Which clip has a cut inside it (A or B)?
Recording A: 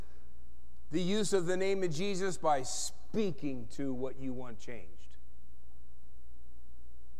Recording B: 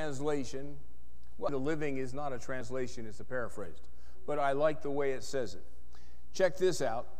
B